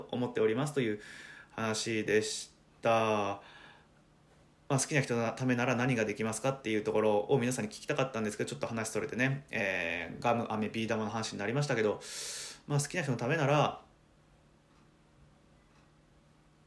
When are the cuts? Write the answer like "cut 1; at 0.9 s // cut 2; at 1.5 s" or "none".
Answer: none